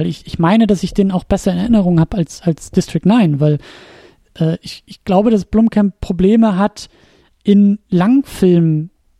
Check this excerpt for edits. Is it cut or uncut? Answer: uncut